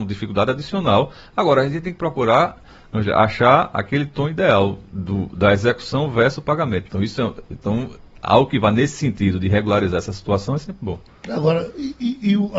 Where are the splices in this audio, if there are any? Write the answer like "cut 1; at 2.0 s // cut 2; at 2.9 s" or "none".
cut 1; at 6.8 s